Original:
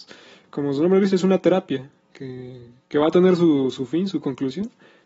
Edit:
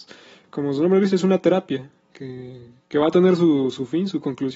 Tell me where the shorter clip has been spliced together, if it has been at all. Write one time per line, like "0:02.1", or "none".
none